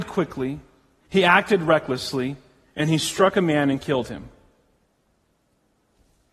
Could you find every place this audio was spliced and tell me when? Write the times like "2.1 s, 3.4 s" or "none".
none